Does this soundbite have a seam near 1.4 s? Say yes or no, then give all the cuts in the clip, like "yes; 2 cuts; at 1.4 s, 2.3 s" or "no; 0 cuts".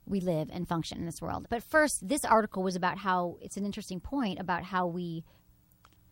yes; 1 cut; at 1.4 s